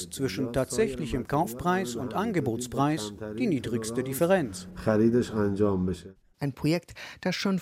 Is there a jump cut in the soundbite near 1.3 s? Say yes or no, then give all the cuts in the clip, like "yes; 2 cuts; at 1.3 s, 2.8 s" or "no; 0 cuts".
no; 1 cut; at 6.3 s